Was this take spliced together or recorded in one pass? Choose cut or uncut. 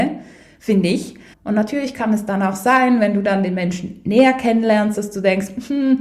cut